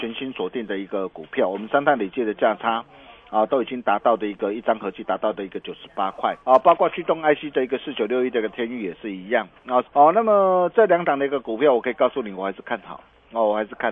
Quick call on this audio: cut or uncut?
cut